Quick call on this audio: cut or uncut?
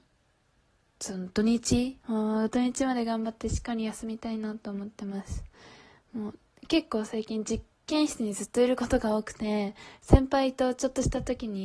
cut